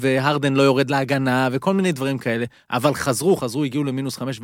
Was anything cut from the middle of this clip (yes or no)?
yes